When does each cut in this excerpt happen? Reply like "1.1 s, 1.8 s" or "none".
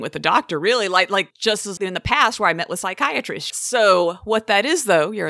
1.8 s, 3.5 s